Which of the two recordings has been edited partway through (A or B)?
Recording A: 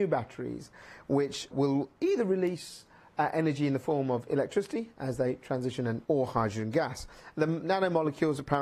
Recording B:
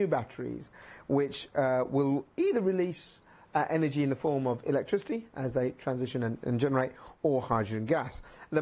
A